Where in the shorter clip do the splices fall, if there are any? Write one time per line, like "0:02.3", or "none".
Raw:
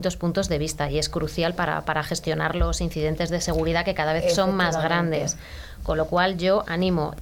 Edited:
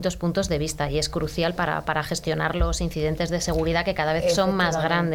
none